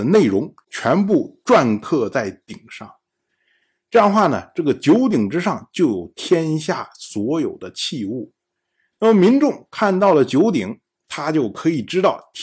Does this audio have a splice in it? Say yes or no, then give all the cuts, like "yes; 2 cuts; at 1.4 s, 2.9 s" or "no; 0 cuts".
no; 0 cuts